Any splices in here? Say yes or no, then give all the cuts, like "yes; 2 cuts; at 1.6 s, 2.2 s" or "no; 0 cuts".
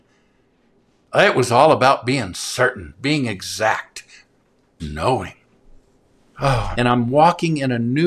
yes; 2 cuts; at 4.8 s, 6.7 s